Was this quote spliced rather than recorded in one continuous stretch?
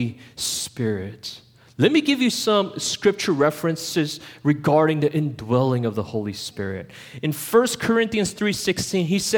no; 0 cuts

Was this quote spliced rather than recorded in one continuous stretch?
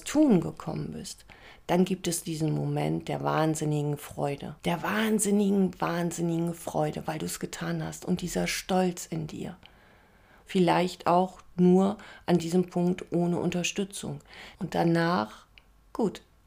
yes; 3 cuts; at 4.6 s, 10.4 s, 14.5 s

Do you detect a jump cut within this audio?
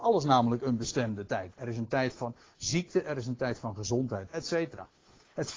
yes; 2 cuts; at 1.5 s, 4.3 s

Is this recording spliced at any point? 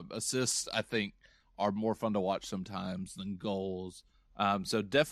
no; 0 cuts

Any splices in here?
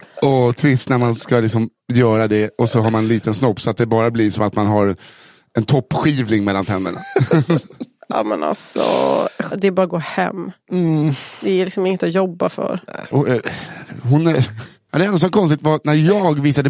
yes; 2 cuts; at 9.5 s, 13.1 s

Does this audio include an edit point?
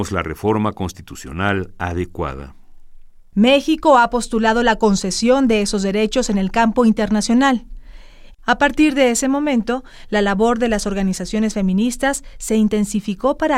yes; 2 cuts; at 3.3 s, 8.3 s

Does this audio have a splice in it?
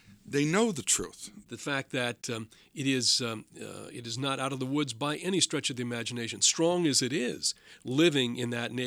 yes; 1 cut; at 1.4 s

